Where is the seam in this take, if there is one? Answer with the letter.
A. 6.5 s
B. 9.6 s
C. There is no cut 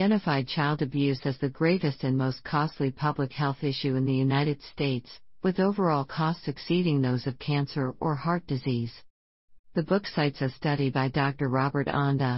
B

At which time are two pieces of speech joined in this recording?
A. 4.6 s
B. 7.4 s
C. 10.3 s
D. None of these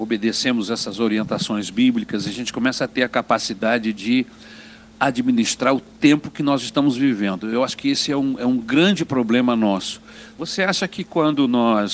C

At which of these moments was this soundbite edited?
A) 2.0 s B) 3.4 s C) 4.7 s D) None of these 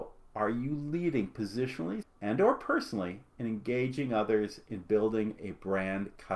A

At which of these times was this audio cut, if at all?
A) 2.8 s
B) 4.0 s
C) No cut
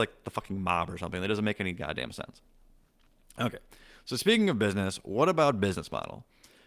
C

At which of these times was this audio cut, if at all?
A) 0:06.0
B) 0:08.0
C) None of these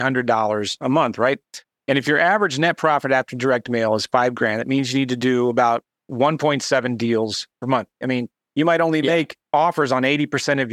B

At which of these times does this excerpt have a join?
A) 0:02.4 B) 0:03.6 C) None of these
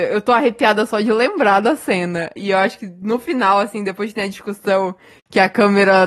A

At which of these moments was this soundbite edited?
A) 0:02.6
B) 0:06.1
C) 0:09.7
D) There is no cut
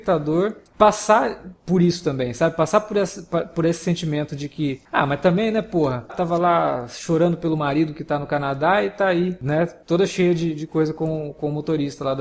B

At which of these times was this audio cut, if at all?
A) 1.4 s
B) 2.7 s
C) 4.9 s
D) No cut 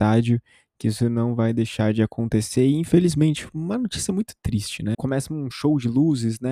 C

